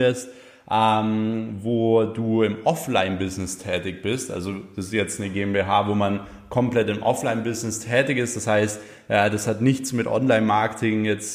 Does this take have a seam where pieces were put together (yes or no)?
no